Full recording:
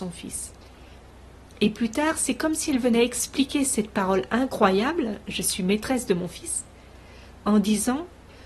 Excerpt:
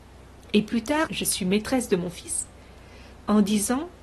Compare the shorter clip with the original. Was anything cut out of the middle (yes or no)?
yes